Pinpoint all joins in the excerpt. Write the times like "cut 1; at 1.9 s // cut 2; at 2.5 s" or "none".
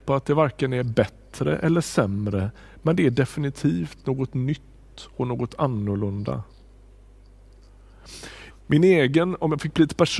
cut 1; at 8.5 s